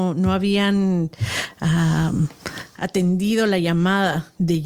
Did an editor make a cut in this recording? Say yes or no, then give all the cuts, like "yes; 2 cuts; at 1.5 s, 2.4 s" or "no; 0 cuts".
no; 0 cuts